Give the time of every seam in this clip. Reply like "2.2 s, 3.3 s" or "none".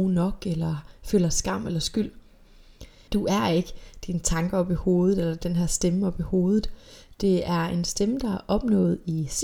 3.1 s